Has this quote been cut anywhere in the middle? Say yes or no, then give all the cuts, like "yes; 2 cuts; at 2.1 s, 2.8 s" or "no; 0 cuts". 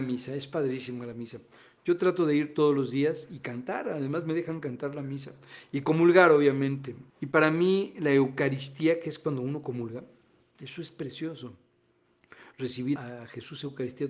yes; 2 cuts; at 7.1 s, 13.0 s